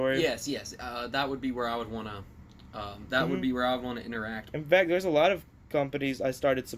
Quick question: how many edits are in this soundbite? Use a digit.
1